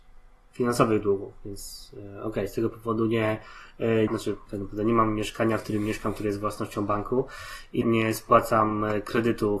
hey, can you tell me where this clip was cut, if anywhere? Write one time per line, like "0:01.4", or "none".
0:04.1
0:07.8